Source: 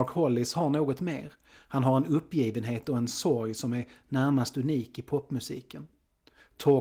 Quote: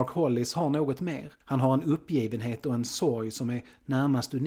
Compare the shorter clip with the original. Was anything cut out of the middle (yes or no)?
yes